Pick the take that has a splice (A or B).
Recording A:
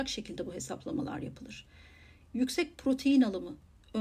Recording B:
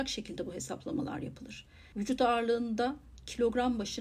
B